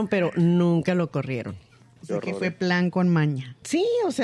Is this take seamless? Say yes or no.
no